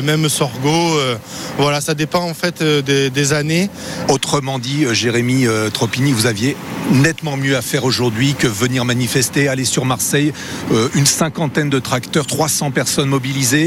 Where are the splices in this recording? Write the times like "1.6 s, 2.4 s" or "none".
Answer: 4.1 s